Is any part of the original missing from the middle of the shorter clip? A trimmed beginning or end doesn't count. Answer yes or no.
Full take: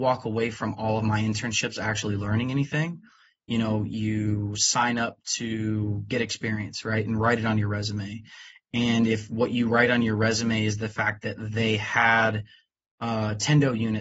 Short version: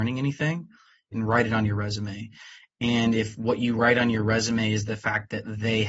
yes